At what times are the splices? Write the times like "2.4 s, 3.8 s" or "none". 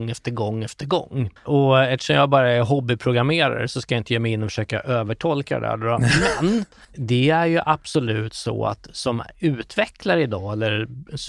1.4 s, 6.8 s

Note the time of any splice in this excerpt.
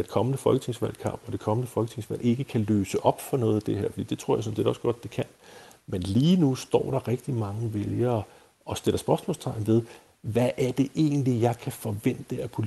none

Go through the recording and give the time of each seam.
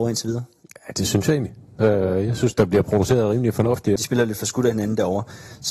1.8 s, 4.0 s

